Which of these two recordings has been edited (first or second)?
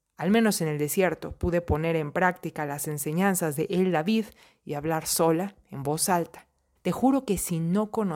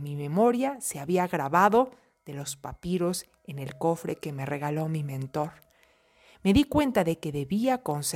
first